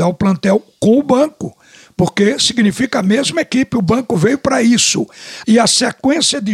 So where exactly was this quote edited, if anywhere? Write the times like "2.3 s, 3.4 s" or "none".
5.4 s